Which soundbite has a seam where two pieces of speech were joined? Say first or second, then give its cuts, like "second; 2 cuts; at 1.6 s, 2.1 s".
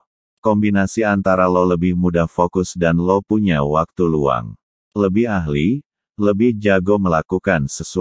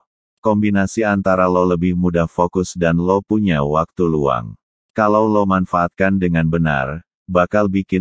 first; 1 cut; at 4.8 s